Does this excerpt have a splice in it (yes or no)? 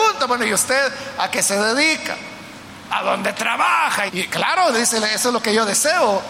yes